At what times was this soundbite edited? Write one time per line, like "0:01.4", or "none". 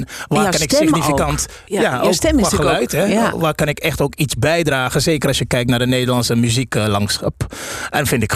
none